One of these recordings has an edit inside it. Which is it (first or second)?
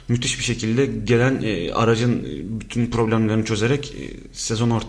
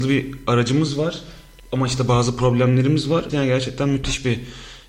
second